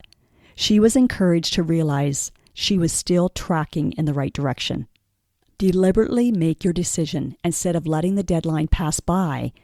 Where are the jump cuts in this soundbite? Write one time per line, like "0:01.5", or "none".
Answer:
0:05.5